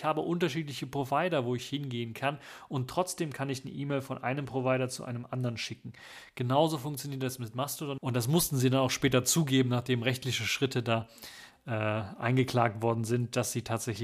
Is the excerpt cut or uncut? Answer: cut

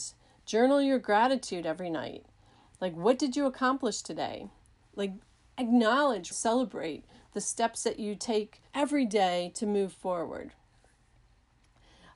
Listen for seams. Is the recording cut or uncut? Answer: cut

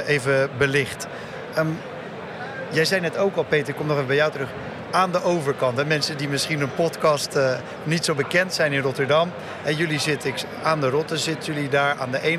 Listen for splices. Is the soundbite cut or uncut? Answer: uncut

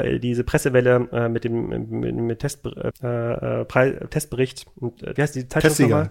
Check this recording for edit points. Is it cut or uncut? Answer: cut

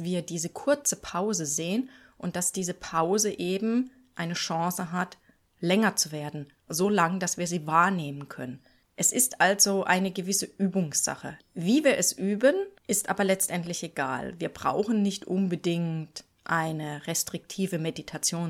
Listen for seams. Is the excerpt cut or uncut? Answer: cut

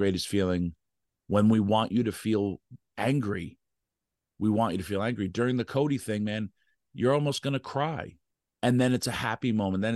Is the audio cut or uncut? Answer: uncut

